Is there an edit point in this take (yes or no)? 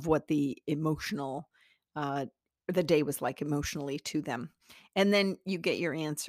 no